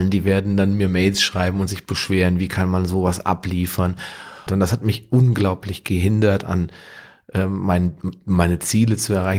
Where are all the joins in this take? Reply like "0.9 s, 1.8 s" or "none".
4.5 s